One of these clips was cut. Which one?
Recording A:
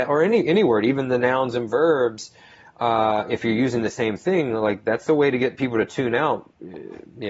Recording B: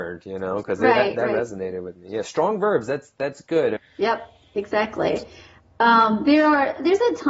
B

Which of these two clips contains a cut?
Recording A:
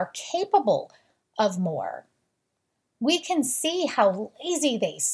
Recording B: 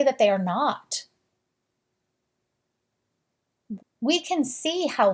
B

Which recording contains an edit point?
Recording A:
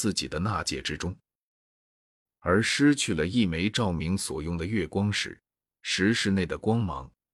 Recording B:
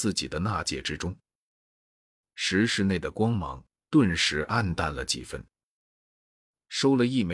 B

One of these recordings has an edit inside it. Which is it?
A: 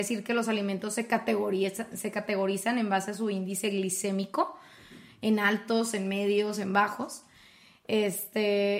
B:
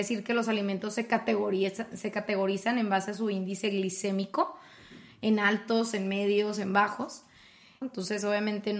B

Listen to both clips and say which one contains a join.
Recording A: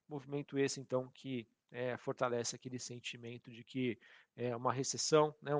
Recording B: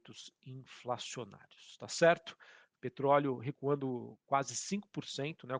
B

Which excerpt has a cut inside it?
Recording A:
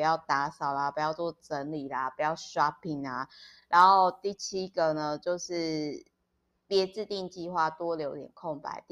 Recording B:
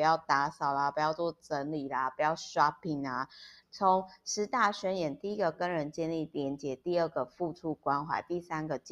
B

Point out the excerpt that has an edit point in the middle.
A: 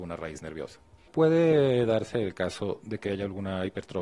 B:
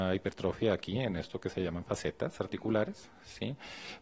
A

